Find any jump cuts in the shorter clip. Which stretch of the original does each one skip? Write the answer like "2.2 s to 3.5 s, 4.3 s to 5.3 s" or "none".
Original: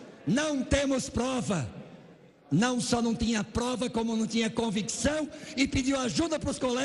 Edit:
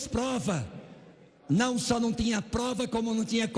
none